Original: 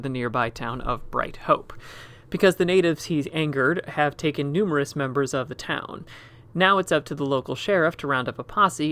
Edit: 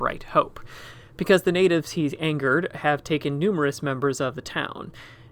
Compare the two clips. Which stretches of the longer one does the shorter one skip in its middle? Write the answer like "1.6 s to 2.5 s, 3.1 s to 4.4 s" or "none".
none